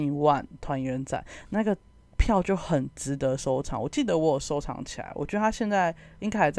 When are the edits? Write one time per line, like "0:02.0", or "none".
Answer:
none